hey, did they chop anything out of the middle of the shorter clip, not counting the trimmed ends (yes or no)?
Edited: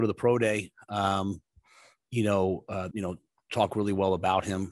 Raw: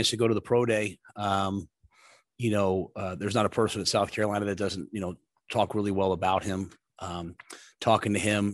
yes